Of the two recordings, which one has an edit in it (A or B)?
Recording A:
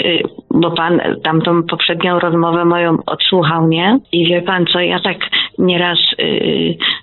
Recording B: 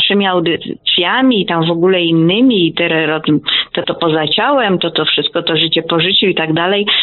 B